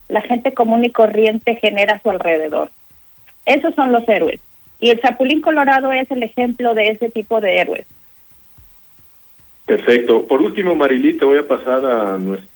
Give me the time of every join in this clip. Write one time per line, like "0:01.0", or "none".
none